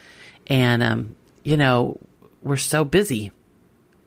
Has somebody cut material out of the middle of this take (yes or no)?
no